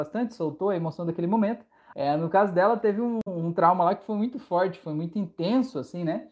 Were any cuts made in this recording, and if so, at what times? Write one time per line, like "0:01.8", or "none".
0:01.9